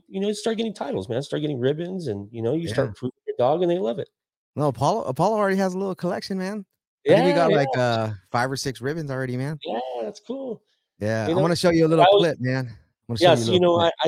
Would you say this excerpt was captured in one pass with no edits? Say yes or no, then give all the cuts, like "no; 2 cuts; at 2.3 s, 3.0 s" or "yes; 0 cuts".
yes; 0 cuts